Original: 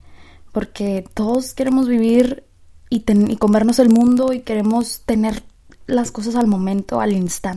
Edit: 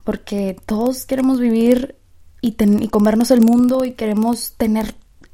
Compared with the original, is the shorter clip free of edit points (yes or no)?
yes